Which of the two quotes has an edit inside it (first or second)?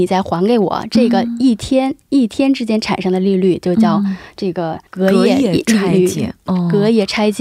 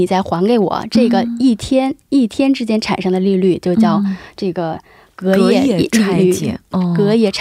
first